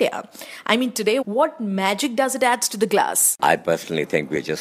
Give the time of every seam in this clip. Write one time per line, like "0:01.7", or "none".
0:01.2

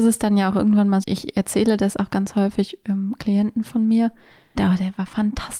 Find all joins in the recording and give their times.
0:01.0
0:04.6

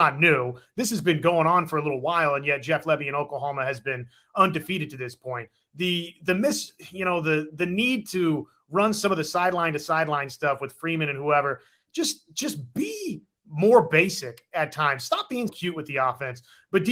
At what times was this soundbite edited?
0:15.5

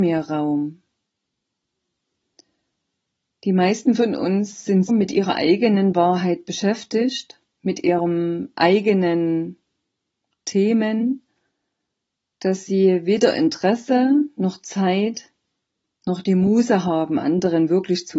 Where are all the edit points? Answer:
0:04.9

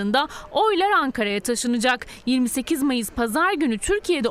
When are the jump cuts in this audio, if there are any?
none

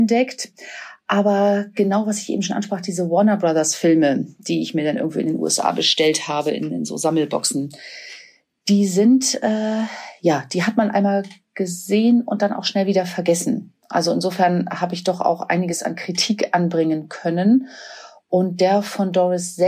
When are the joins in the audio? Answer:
none

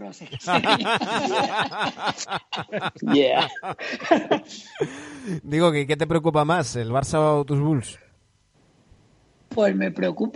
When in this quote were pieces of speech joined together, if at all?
none

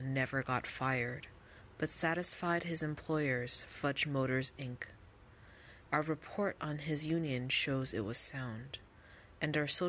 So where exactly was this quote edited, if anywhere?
0:05.9

